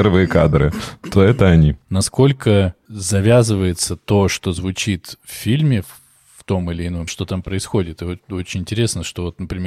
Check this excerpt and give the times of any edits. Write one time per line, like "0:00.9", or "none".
0:07.1